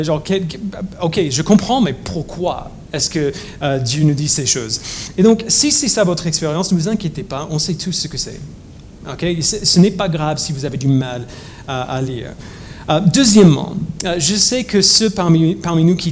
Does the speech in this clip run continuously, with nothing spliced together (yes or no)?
yes